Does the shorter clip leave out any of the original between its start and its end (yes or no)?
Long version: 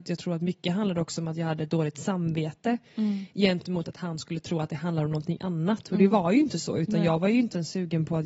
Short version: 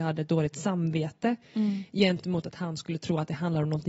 no